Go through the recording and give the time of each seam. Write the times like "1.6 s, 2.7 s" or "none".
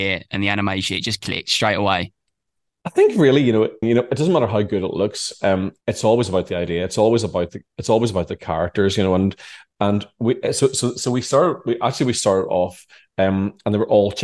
3.8 s, 5.8 s